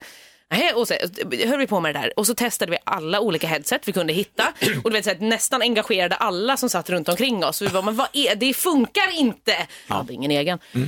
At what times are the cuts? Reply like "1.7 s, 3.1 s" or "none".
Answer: 9.9 s